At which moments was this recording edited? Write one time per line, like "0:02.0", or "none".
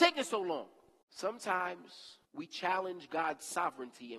0:01.0
0:02.3